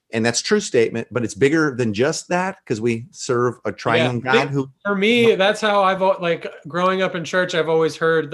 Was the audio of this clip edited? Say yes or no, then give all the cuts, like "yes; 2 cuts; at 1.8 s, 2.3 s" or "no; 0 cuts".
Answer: no; 0 cuts